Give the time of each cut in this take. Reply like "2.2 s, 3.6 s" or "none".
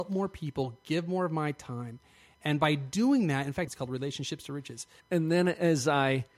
3.7 s, 5.0 s

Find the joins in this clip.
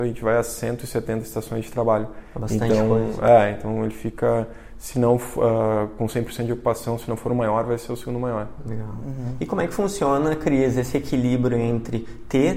none

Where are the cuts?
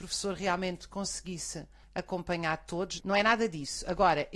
3.0 s

